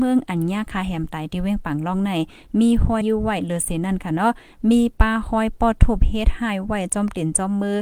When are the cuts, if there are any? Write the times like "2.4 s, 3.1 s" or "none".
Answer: 3.0 s